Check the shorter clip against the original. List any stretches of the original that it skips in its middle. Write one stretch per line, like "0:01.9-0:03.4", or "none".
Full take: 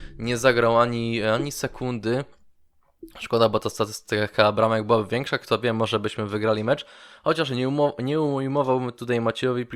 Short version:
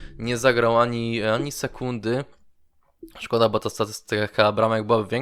none